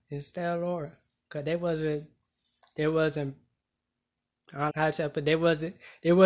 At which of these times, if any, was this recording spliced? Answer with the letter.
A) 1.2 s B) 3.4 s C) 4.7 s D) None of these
C